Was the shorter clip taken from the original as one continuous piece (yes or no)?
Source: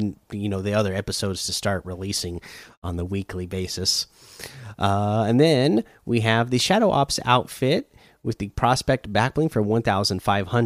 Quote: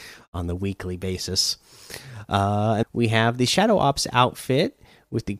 no